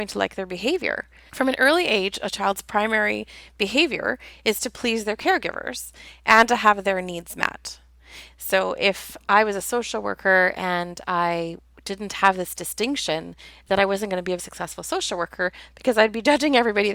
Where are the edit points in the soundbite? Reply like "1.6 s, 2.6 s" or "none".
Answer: 1.3 s, 8.3 s, 14.4 s